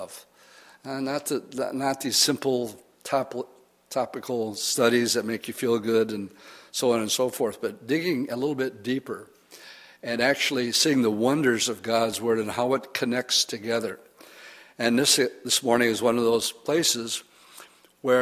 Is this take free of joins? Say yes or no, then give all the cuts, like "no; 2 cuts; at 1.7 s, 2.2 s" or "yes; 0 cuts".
yes; 0 cuts